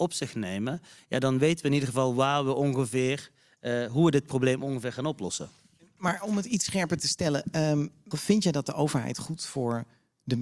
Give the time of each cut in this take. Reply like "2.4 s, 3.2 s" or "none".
8.1 s